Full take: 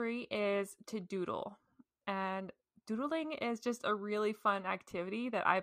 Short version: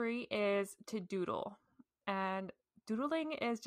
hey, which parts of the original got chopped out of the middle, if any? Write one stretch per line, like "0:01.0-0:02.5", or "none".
none